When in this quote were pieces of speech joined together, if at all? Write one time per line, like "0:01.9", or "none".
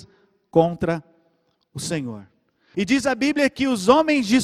0:02.7